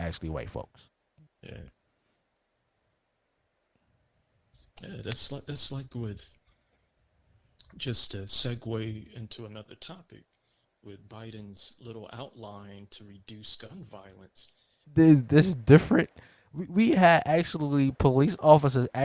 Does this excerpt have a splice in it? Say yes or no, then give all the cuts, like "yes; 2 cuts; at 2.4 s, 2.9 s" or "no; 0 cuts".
yes; 2 cuts; at 1.3 s, 14.8 s